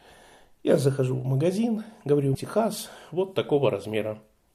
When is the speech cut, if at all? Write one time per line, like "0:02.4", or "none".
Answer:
0:02.3